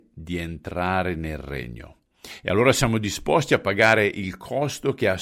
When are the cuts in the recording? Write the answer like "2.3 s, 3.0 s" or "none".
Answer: none